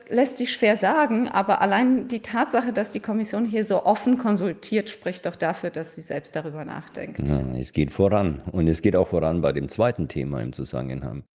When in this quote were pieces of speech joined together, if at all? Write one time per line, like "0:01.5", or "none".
none